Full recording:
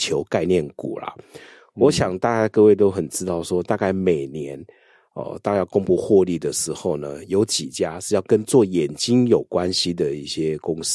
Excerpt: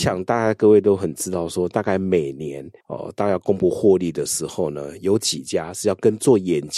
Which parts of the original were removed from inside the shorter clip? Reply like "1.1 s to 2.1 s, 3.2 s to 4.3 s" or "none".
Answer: 4.7 s to 5.1 s